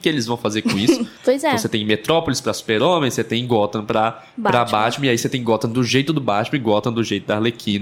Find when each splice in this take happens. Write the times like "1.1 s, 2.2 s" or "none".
1.2 s